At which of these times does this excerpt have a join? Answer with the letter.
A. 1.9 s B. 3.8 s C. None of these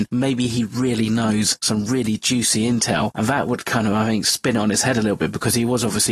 C